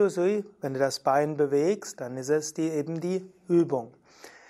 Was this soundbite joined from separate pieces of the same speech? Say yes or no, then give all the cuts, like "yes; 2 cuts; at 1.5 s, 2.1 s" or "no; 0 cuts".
no; 0 cuts